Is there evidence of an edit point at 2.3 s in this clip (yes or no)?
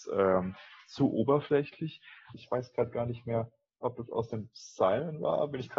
yes